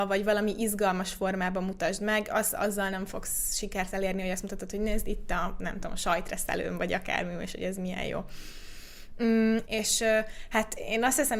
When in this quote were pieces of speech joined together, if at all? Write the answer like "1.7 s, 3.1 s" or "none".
9.6 s